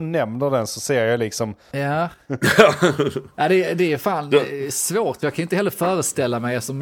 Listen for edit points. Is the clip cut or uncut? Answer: cut